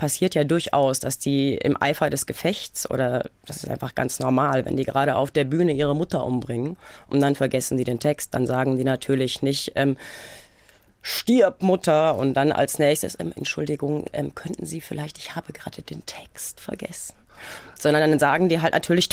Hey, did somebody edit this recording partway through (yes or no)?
no